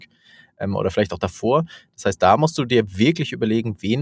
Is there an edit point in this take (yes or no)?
no